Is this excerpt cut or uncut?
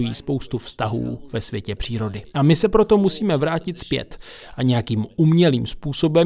cut